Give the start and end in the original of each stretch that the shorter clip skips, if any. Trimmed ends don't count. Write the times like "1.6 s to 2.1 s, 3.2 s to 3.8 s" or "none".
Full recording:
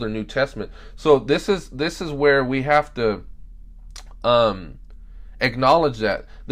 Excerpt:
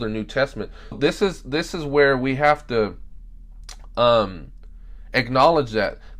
0.9 s to 1.2 s